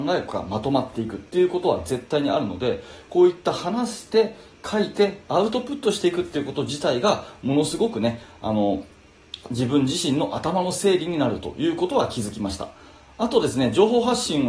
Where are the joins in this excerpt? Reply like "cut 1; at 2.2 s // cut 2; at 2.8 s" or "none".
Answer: none